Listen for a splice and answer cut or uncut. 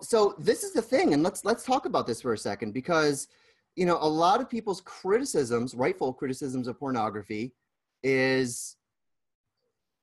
uncut